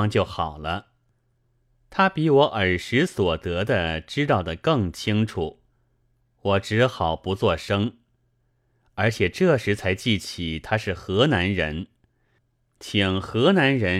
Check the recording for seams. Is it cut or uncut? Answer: uncut